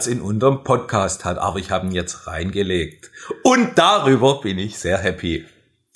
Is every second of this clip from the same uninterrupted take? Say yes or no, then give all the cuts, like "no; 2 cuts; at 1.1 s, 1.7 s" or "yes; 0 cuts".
yes; 0 cuts